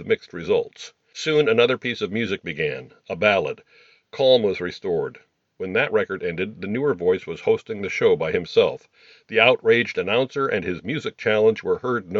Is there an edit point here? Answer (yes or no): no